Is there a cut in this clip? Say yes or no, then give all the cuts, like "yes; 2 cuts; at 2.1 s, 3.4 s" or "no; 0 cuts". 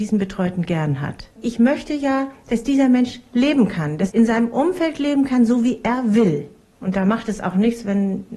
yes; 2 cuts; at 4.1 s, 6.7 s